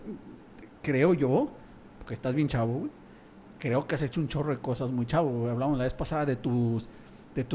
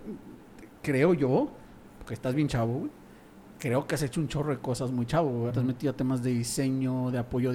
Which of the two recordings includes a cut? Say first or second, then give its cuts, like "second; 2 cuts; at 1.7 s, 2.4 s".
second; 1 cut; at 5.5 s